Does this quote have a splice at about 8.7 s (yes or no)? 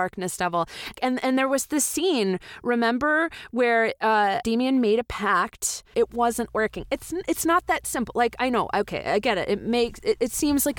no